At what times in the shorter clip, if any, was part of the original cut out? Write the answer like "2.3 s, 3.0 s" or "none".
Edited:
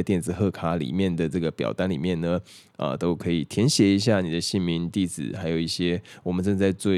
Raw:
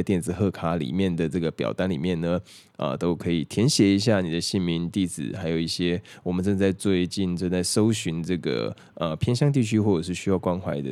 none